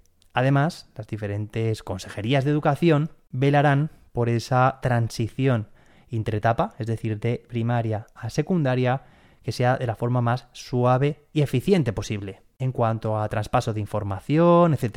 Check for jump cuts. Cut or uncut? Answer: uncut